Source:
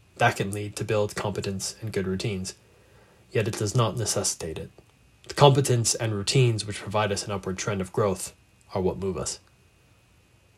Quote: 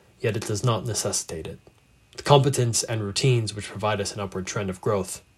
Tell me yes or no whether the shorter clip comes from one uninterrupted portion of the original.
yes